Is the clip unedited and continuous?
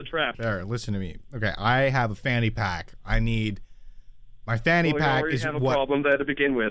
yes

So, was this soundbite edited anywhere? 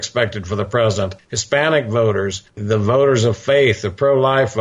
no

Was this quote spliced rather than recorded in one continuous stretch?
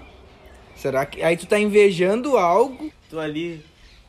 yes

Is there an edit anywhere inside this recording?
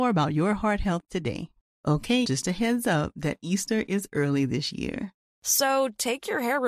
yes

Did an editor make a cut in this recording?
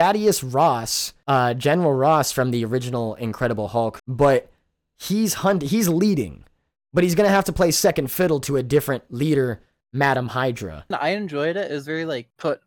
yes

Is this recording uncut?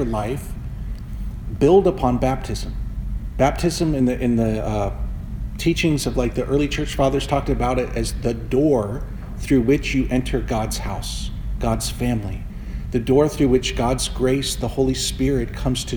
yes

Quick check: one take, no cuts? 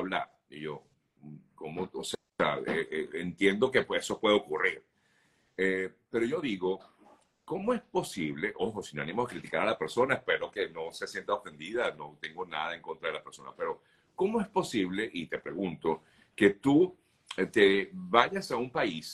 yes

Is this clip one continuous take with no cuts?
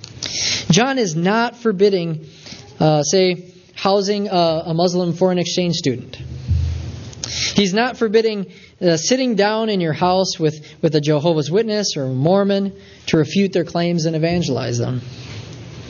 yes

